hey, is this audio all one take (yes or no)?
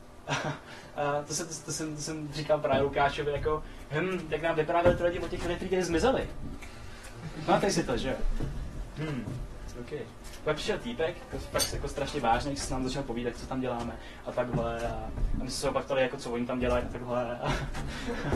no